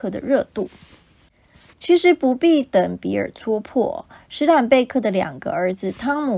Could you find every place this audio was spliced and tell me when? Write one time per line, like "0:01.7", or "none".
0:01.7